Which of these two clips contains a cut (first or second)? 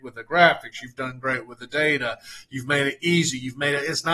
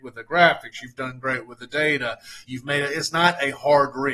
second